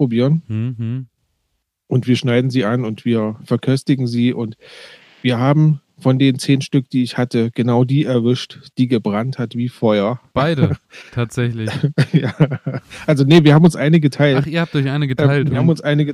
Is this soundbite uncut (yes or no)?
yes